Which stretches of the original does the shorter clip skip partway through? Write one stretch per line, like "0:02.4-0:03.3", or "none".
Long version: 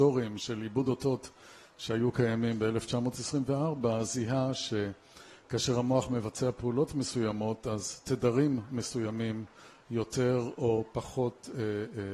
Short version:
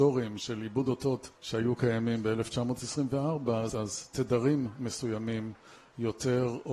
0:01.3-0:01.7
0:04.1-0:07.6